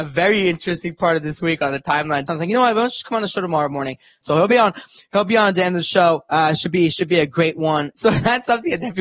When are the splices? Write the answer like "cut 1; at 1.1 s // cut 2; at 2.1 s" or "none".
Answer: cut 1; at 2.3 s // cut 2; at 4.2 s // cut 3; at 7.9 s